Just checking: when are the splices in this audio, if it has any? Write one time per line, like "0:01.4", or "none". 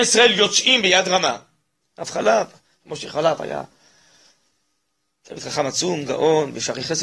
0:01.8